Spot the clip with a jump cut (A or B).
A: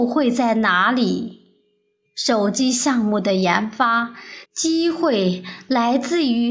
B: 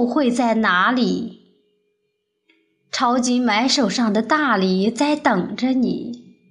A